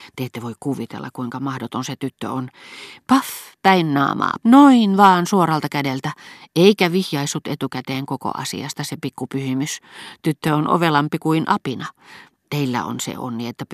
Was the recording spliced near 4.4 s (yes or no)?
yes